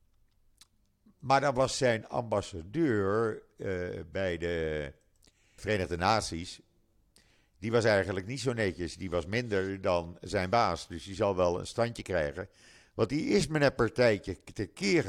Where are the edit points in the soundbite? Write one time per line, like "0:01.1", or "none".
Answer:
0:05.6